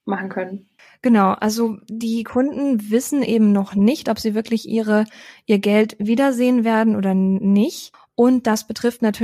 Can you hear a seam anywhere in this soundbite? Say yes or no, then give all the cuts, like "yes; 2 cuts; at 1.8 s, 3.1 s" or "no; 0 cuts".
no; 0 cuts